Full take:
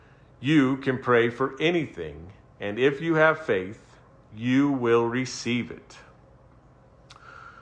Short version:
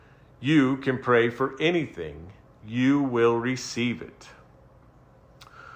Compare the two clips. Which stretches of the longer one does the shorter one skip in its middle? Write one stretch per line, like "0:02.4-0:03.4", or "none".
0:02.5-0:04.2